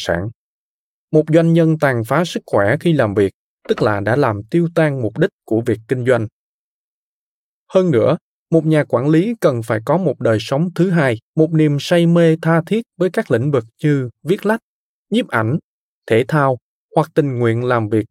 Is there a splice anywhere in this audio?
yes; 1 cut; at 11.3 s

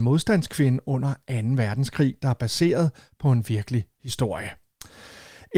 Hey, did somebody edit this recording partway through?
no; 0 cuts

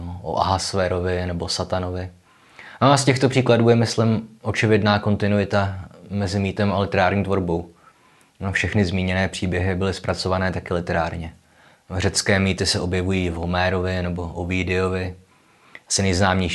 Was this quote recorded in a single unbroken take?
yes; 0 cuts

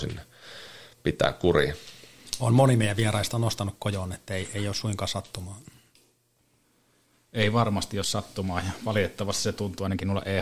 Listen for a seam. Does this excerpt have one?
no; 0 cuts

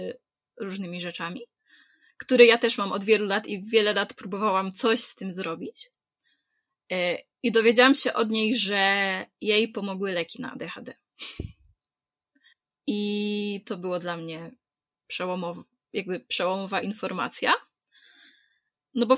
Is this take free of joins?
yes; 0 cuts

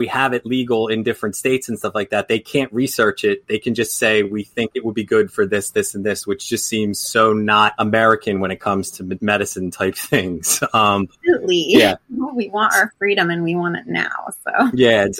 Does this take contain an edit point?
no; 0 cuts

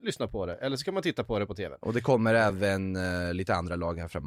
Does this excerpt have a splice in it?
no; 0 cuts

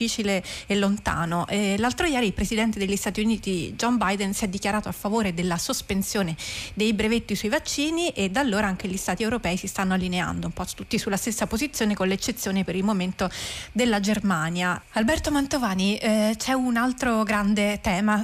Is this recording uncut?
no; 1 cut; at 14.8 s

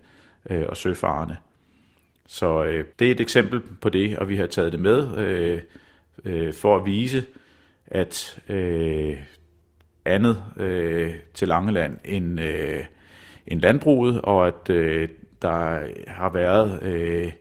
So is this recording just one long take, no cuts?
no; 2 cuts; at 2.9 s, 10.1 s

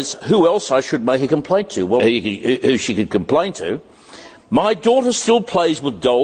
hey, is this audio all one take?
no; 1 cut; at 2.0 s

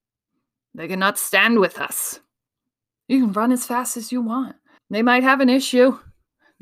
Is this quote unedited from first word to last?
no; 2 cuts; at 2.9 s, 4.8 s

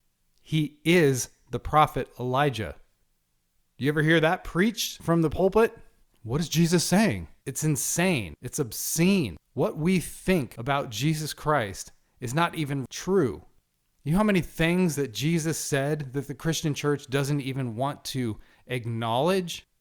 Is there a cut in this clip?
yes; 2 cuts; at 6.1 s, 7.4 s

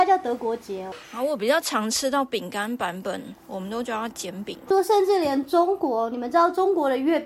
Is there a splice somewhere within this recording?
yes; 1 cut; at 4.7 s

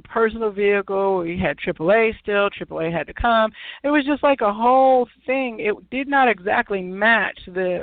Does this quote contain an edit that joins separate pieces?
no; 0 cuts

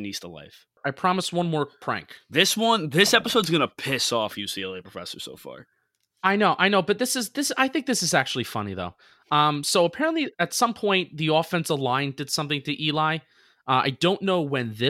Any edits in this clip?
yes; 1 cut; at 10.3 s

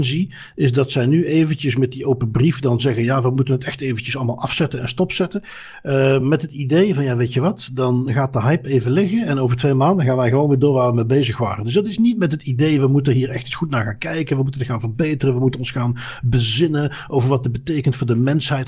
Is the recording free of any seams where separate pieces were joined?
yes; 0 cuts

